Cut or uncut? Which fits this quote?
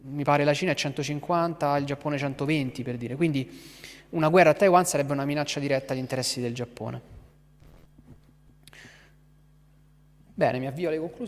uncut